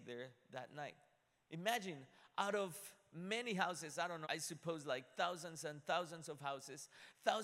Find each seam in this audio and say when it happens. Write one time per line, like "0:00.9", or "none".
0:04.2